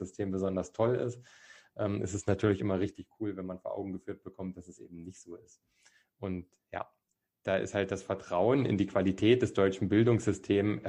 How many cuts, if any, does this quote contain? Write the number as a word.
one